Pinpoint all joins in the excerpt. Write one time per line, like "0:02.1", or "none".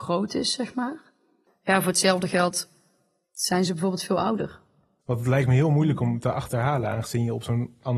0:01.5
0:05.0